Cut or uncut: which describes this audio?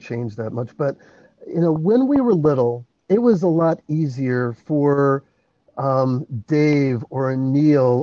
uncut